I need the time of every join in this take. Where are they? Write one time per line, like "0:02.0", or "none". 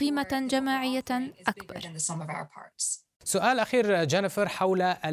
0:03.1